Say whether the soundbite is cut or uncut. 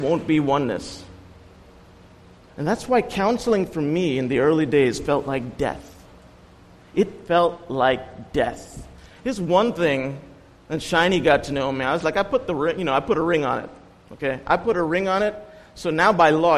uncut